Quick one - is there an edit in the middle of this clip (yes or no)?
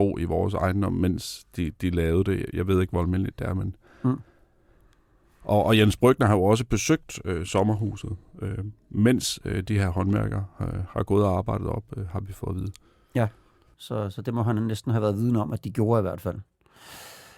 no